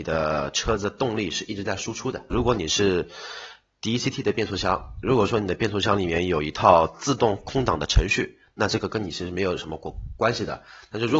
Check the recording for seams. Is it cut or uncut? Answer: cut